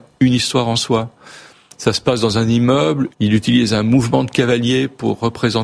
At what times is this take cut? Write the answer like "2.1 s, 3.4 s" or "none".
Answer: 3.1 s